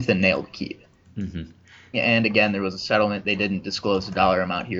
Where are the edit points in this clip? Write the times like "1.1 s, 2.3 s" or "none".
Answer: 1.9 s